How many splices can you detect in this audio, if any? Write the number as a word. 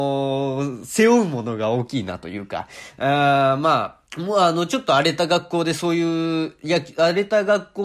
one